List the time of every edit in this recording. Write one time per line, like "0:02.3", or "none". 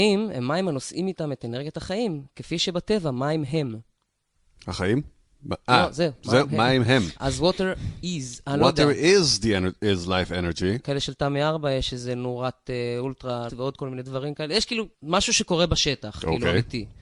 0:10.8
0:13.5
0:14.9